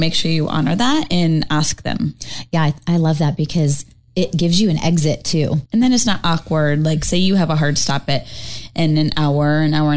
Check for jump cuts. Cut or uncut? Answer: cut